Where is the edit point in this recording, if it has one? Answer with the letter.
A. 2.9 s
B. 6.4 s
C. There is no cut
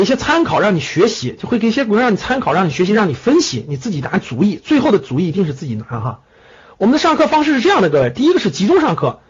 C